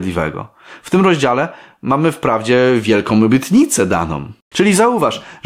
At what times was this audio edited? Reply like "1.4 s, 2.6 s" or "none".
4.5 s